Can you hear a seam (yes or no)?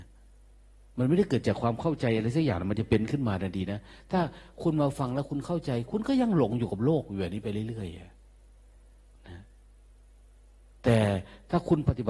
no